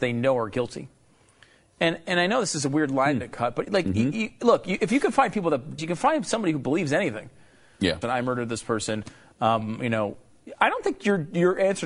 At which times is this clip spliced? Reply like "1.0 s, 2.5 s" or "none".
5.8 s, 8.0 s